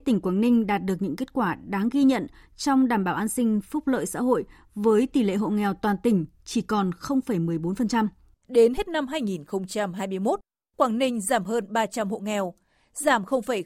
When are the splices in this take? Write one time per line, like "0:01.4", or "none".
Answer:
0:08.3